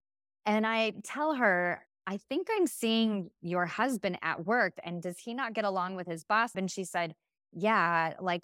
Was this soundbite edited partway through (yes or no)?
yes